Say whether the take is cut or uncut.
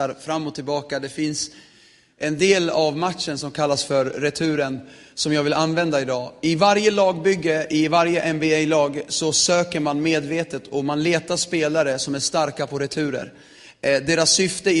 uncut